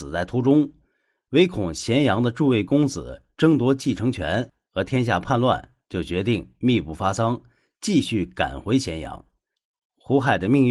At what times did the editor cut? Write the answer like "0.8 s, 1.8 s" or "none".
none

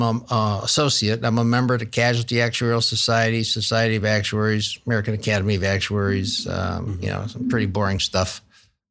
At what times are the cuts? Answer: none

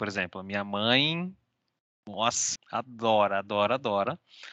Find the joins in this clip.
2.6 s

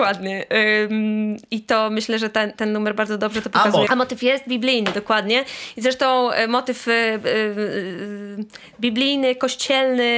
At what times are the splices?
3.9 s

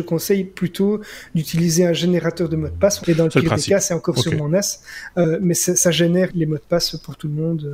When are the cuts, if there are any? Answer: 3.0 s, 6.3 s

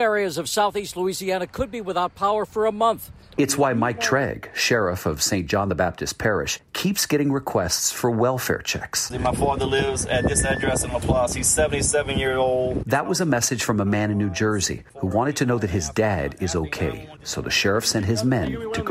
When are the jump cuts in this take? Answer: 3.3 s

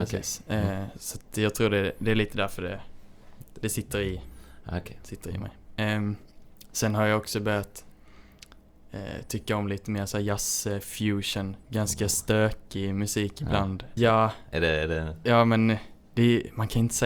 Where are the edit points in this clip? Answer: 14.0 s

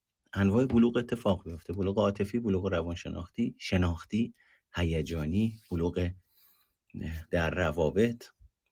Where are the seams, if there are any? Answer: 7.3 s

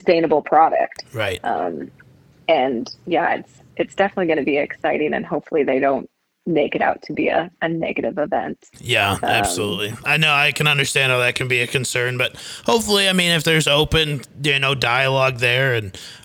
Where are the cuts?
none

